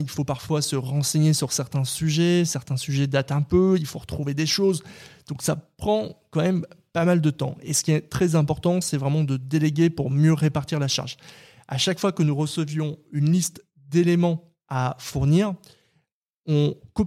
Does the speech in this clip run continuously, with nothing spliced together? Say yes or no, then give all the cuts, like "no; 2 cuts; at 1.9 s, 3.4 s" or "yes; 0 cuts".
yes; 0 cuts